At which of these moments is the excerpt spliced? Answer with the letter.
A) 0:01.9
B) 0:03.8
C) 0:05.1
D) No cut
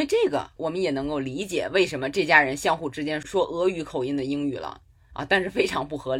C